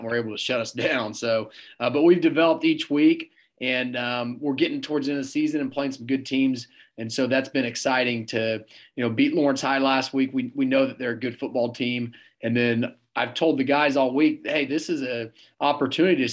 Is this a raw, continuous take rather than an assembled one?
yes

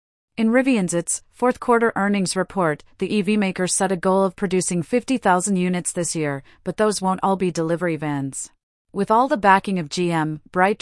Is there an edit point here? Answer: yes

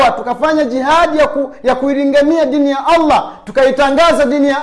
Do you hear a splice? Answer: no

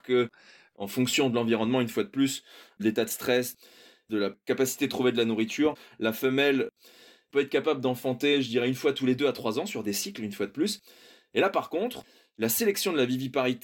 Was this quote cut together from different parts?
no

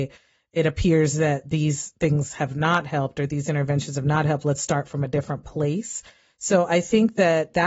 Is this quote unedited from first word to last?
yes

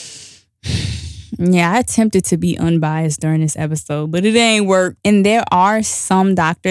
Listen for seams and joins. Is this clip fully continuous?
no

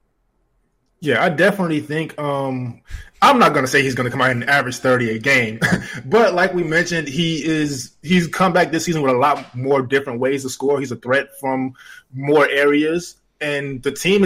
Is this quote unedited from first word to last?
yes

